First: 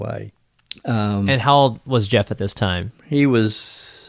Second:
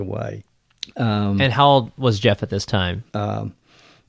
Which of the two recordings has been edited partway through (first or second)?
second